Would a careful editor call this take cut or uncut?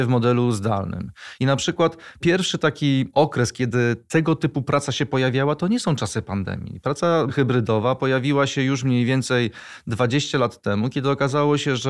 uncut